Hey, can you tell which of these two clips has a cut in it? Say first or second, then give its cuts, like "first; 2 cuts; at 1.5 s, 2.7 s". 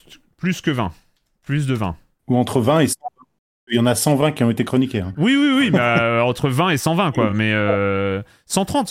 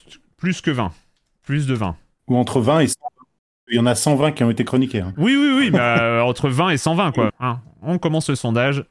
second; 1 cut; at 7.3 s